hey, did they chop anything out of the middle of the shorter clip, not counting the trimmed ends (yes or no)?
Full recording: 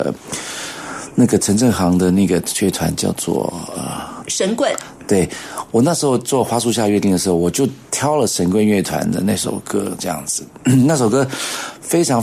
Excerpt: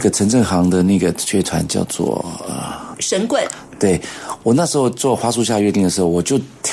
no